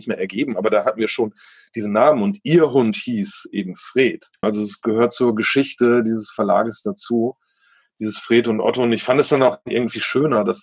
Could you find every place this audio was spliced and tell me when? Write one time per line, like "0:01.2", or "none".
0:04.4

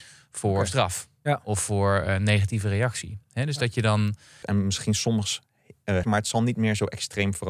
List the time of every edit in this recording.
0:04.4
0:06.0

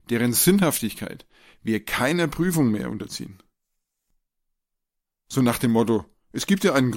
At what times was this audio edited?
none

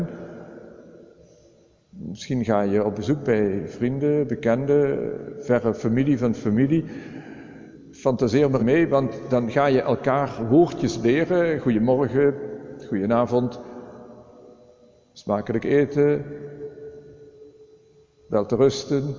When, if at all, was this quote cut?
0:08.6

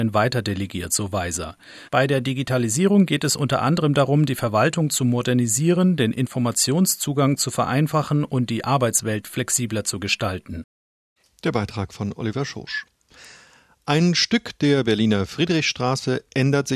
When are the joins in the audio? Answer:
none

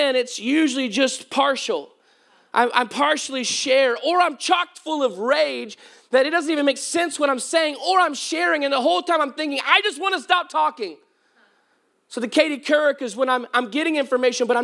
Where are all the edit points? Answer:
none

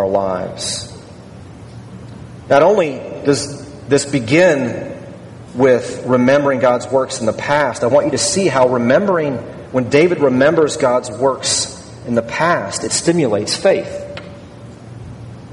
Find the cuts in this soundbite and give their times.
none

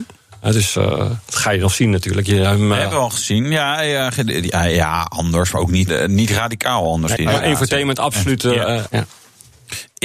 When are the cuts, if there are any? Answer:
0:05.9
0:07.2
0:08.9

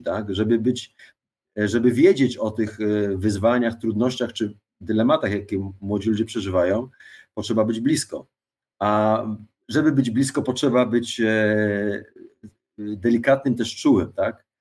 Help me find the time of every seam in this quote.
none

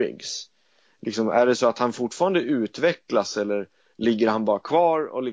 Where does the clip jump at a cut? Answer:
none

